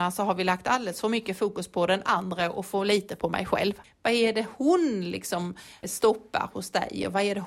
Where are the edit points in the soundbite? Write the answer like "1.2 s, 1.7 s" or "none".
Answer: 3.8 s, 5.8 s